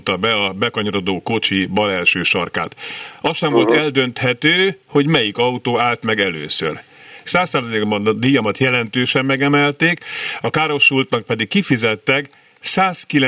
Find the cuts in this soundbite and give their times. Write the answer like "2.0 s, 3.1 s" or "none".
7.3 s